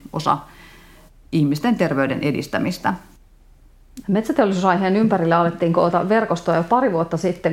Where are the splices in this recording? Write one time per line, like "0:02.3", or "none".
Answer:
0:04.0